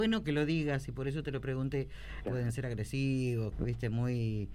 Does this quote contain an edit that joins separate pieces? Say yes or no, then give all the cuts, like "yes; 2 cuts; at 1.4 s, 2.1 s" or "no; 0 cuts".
yes; 2 cuts; at 2.2 s, 3.5 s